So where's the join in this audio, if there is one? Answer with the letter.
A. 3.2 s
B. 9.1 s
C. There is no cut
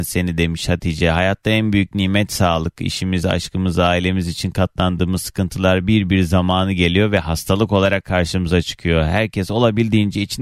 C